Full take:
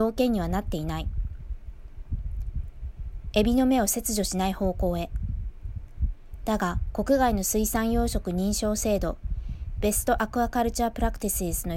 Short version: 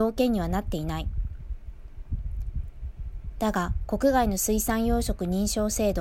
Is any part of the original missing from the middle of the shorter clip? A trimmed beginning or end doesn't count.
yes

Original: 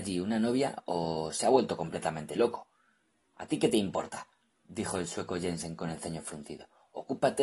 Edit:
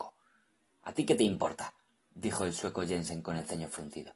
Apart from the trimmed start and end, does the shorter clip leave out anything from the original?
no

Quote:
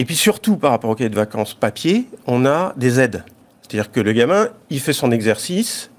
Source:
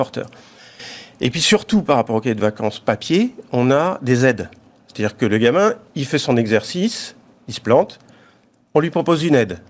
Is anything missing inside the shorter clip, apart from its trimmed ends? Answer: no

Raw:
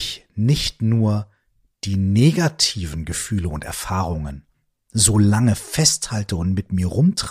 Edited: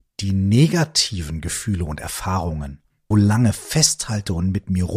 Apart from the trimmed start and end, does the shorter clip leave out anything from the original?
yes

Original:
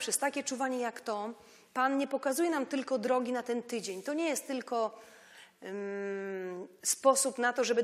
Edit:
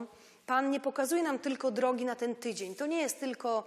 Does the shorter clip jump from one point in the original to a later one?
no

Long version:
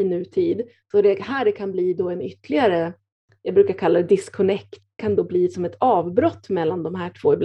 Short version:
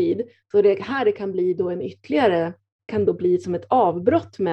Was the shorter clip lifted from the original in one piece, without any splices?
no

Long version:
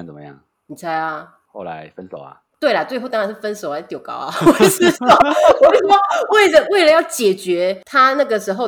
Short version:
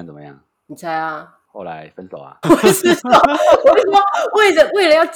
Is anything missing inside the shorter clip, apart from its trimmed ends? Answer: yes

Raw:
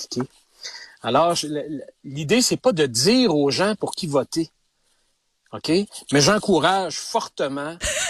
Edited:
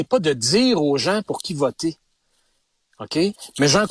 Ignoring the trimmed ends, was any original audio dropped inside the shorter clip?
no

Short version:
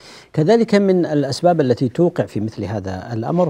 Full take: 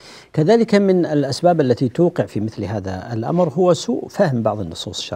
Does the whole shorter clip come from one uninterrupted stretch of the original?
yes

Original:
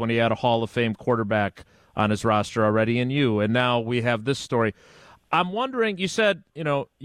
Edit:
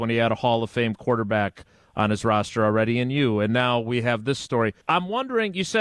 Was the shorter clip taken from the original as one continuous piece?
no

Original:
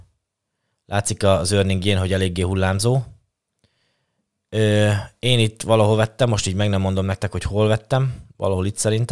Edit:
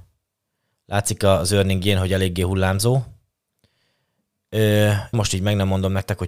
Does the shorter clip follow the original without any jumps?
no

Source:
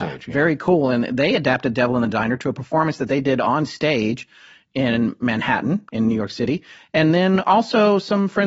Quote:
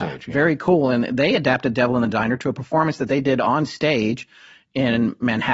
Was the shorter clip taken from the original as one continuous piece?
yes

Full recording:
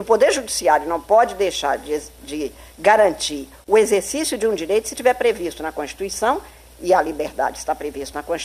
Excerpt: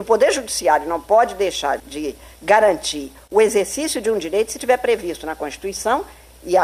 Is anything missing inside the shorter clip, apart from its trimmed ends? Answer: yes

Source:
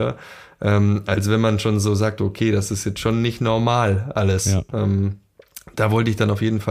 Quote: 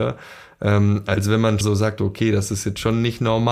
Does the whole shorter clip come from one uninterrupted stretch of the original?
no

